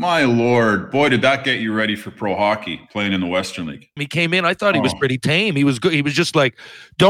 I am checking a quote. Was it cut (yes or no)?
yes